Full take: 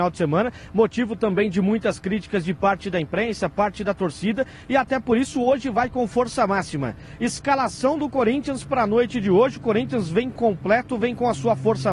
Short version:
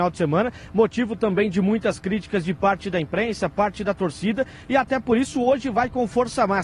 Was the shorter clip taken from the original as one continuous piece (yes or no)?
yes